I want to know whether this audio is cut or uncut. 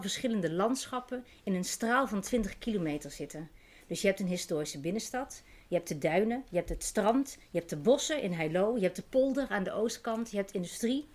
uncut